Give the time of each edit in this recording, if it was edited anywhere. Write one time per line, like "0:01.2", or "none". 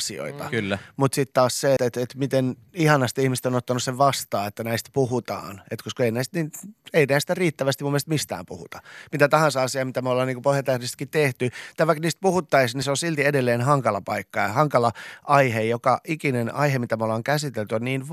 0:01.8